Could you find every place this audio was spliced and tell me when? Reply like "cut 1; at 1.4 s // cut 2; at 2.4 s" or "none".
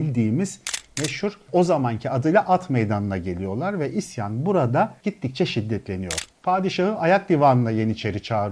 cut 1; at 6.3 s